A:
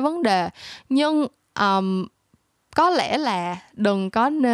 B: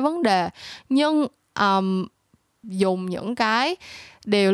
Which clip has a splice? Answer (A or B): B